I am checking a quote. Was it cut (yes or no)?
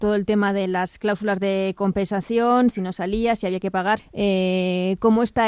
yes